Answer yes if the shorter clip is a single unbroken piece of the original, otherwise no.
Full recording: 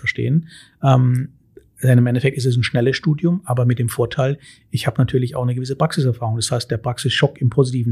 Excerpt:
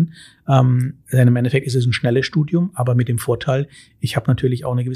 no